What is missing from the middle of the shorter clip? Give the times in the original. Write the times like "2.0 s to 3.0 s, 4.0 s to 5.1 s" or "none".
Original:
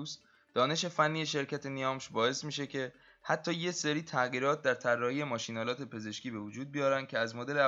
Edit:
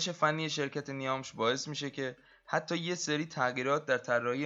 none